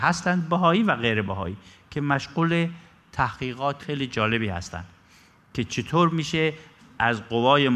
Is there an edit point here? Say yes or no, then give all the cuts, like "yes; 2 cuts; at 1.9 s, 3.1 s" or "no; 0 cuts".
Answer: yes; 1 cut; at 3.8 s